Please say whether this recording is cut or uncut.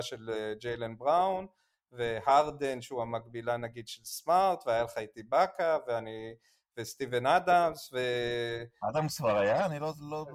uncut